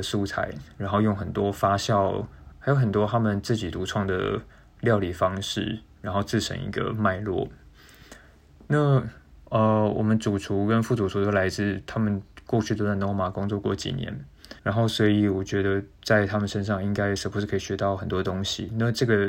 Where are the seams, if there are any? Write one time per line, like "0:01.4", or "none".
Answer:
0:02.5
0:14.6